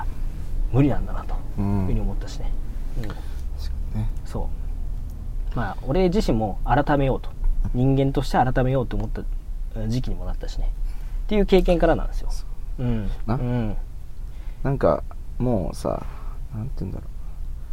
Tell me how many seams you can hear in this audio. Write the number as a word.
two